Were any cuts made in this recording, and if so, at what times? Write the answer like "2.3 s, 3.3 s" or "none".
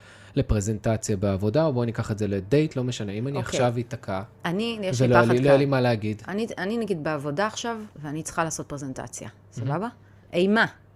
7.9 s